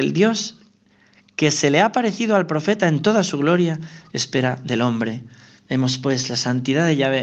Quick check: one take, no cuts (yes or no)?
yes